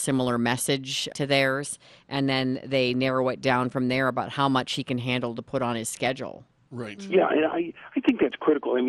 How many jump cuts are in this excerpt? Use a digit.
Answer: 1